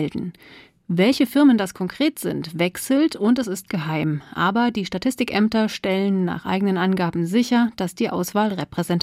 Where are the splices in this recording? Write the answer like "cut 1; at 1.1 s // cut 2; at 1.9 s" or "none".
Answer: none